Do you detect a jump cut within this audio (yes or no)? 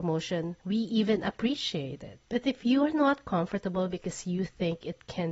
yes